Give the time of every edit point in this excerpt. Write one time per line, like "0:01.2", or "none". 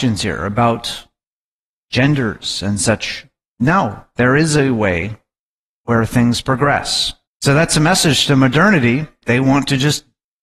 0:03.5
0:07.3